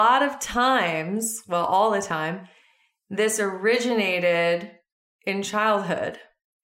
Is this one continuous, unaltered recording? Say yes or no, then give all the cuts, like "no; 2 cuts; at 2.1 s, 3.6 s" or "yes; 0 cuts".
yes; 0 cuts